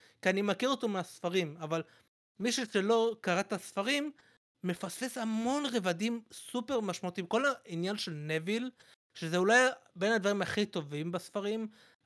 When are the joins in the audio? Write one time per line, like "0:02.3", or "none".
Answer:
none